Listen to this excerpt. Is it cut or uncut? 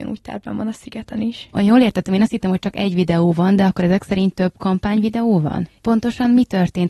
cut